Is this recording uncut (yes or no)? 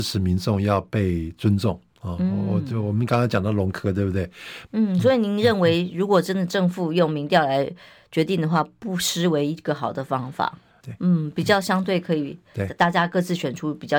no